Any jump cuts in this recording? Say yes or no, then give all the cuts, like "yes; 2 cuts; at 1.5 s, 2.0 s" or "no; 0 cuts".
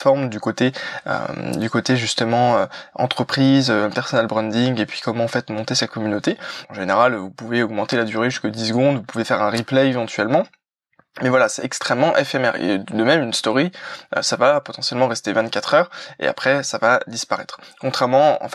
yes; 1 cut; at 6.6 s